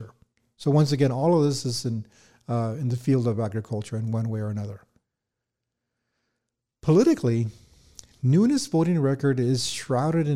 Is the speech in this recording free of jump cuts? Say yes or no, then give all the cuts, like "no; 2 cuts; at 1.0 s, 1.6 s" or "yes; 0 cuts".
yes; 0 cuts